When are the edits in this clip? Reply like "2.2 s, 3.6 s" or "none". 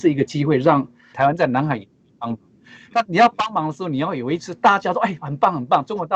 1.1 s

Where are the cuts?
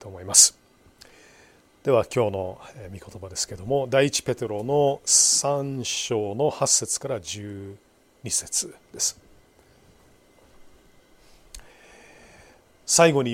none

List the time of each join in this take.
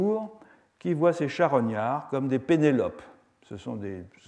none

